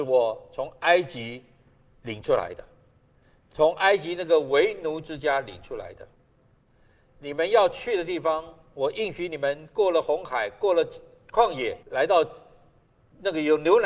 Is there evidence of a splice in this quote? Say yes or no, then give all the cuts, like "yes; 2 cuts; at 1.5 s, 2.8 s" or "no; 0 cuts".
yes; 1 cut; at 11.8 s